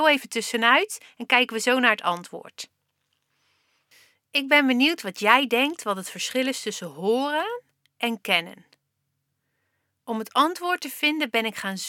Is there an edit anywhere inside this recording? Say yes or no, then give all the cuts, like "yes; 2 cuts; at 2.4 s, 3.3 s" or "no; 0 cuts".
no; 0 cuts